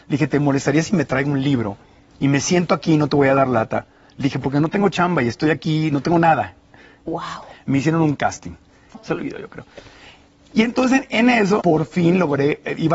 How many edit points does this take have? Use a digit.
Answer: 3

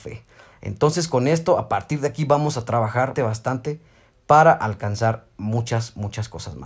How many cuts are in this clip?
1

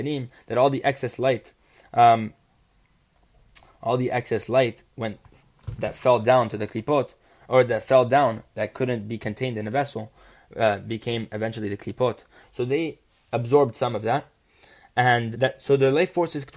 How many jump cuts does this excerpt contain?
2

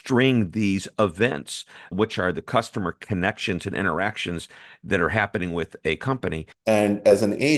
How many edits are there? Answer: 2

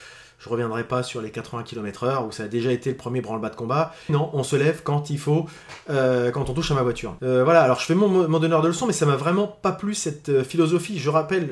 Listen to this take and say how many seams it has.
2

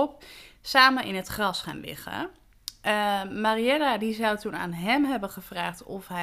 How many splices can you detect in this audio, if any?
0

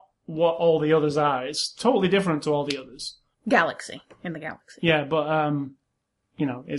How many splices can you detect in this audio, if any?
1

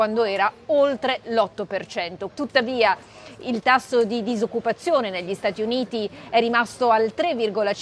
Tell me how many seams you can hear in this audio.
1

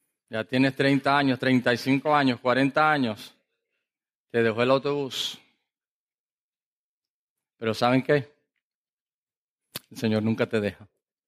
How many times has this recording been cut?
0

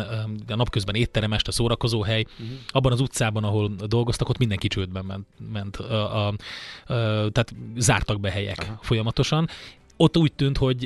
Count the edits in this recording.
0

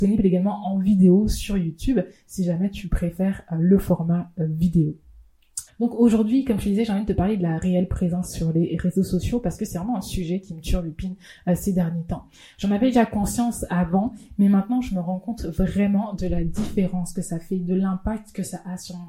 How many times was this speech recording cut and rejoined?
1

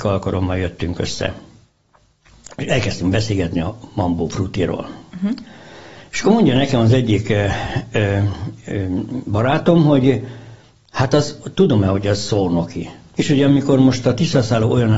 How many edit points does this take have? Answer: 1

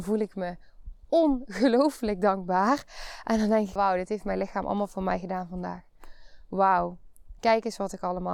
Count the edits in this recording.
1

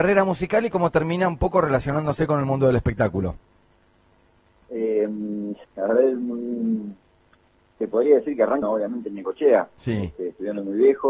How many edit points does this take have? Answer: 2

